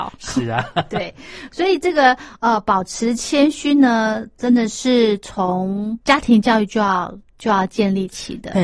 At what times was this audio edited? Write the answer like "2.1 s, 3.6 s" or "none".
6.0 s